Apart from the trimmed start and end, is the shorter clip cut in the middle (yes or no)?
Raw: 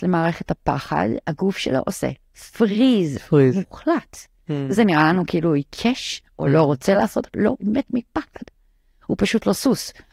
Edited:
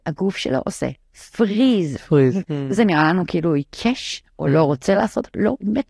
yes